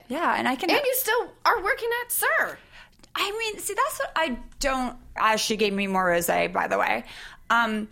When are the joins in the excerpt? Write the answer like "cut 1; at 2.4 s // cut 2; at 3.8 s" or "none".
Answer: cut 1; at 5.2 s